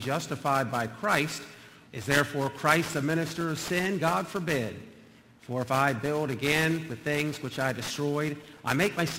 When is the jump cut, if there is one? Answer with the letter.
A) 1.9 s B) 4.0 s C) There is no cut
A